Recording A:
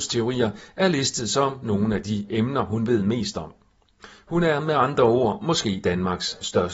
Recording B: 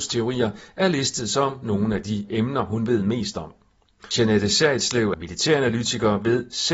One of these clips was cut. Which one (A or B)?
B